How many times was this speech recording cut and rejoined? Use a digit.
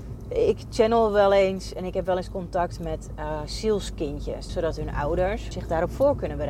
2